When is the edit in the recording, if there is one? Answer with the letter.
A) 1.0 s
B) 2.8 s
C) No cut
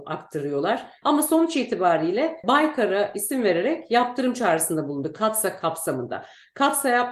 A